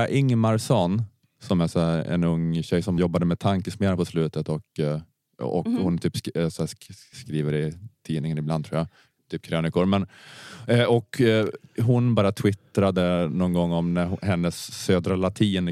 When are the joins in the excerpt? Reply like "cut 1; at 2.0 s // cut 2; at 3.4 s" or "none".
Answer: none